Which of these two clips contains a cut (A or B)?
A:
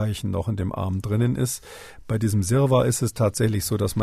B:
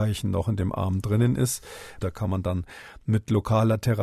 B